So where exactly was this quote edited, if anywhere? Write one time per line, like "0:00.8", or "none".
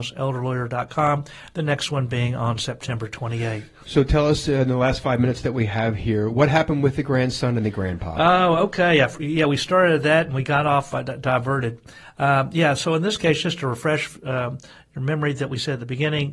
none